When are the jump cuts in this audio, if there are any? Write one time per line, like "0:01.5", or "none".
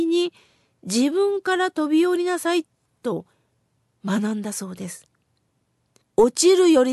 0:06.0